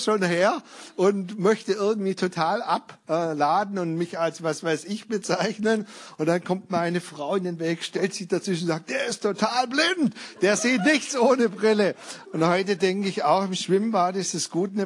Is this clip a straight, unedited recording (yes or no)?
no